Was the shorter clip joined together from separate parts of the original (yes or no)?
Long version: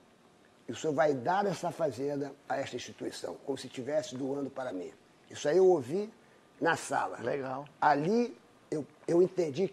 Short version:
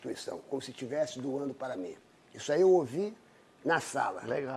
no